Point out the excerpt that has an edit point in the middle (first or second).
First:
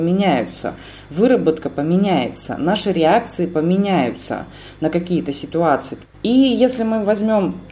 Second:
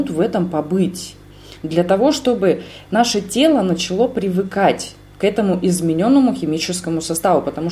first